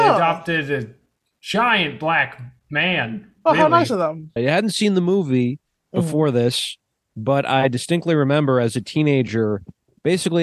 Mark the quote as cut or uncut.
cut